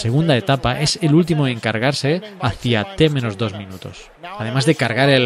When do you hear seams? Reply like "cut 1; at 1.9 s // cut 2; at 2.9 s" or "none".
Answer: cut 1; at 4.1 s